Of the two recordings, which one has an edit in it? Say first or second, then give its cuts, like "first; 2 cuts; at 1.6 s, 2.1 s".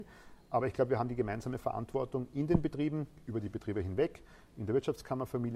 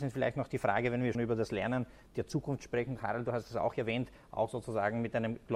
second; 1 cut; at 1.1 s